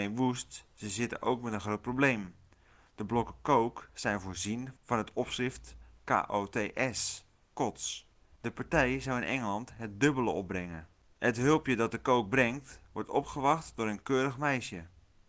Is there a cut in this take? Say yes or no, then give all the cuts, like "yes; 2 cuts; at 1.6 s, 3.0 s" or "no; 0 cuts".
yes; 1 cut; at 8.4 s